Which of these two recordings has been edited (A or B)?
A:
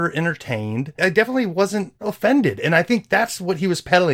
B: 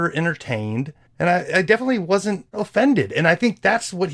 A